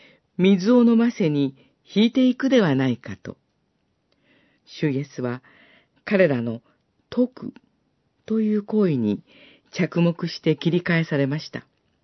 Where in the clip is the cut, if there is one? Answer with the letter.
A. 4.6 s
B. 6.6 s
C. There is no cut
A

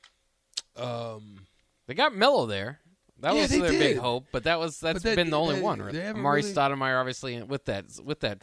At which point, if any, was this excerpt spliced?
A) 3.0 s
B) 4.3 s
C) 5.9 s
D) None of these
C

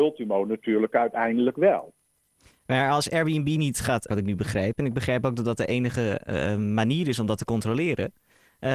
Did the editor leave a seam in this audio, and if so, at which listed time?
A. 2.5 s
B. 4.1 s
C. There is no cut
B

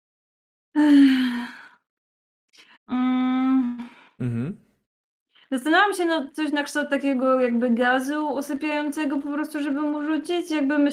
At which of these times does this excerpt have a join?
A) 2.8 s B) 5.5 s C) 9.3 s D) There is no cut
A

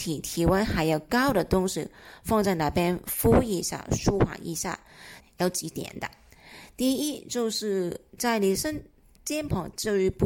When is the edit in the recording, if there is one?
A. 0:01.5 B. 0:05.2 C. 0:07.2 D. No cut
B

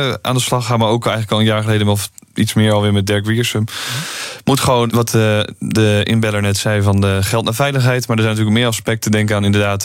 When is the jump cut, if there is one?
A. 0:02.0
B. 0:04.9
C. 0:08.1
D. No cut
B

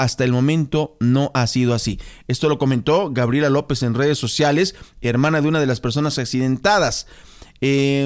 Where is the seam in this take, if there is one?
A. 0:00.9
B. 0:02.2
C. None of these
C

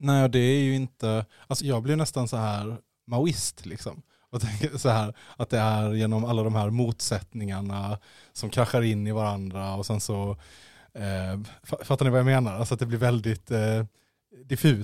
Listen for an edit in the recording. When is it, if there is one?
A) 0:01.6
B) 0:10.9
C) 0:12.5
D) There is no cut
A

